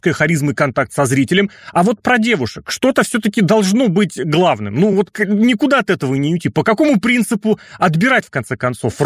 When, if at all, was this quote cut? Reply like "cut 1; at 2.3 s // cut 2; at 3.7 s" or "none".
none

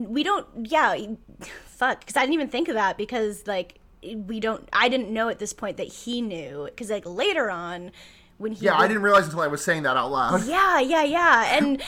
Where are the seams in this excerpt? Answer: none

